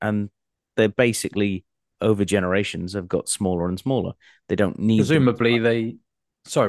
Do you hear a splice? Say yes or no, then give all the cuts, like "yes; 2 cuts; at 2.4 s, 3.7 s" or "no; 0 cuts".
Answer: no; 0 cuts